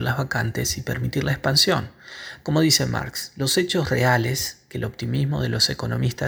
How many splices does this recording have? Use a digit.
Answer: 1